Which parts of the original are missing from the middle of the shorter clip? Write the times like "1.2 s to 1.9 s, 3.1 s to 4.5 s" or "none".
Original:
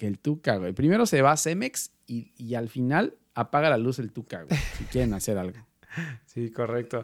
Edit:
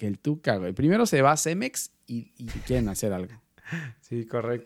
2.5 s to 4.7 s